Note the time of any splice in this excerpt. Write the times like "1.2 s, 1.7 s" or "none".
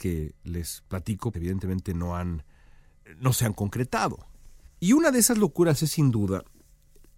1.3 s, 4.7 s